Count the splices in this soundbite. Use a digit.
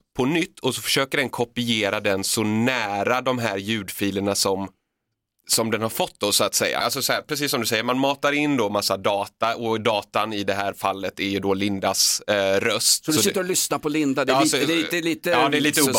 1